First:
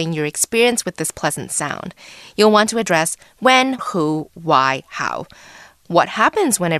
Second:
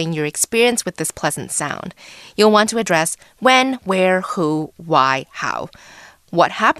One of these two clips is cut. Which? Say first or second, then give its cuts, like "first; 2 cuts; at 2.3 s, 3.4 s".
first; 1 cut; at 3.8 s